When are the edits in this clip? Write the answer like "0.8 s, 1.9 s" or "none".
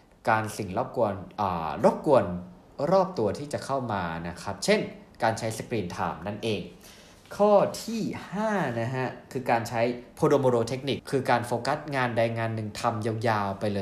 11.0 s